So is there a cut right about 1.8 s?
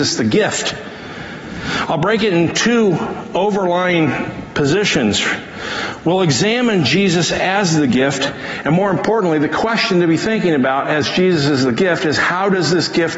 yes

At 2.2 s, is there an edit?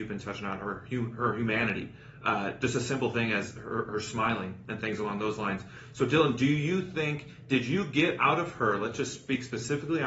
no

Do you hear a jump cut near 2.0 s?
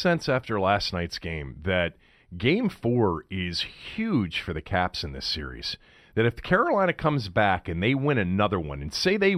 no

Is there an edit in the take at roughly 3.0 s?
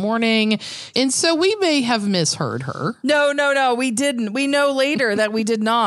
no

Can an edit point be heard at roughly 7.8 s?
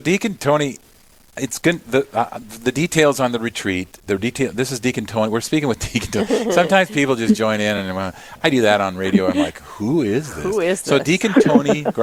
no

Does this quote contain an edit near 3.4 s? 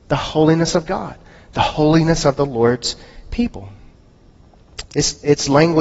no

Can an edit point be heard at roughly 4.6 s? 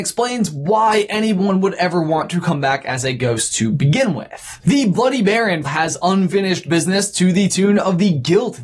yes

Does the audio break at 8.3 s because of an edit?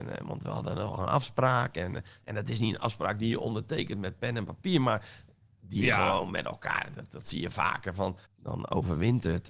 yes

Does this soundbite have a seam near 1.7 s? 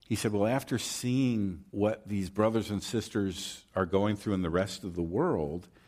yes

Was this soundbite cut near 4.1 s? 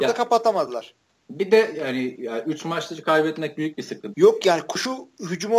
yes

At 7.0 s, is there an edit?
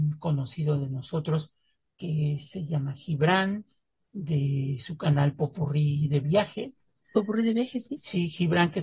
yes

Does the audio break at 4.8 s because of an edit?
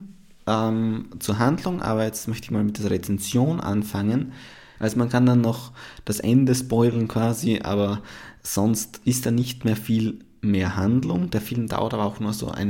yes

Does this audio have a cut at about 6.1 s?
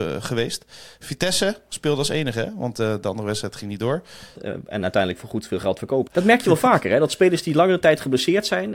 yes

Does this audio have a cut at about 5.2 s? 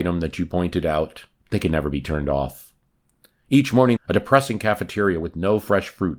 no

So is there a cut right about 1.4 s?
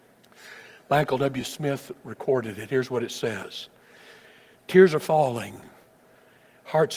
no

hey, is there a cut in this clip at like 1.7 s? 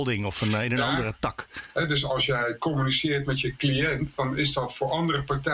yes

